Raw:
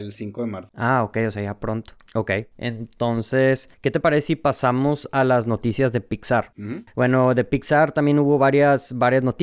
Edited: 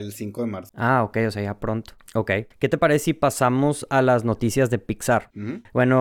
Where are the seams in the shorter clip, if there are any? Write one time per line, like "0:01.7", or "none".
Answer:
0:02.5